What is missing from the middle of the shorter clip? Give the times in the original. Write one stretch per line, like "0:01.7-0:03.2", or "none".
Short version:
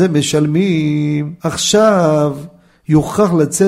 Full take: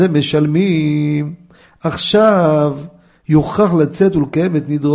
0:01.4-0:01.8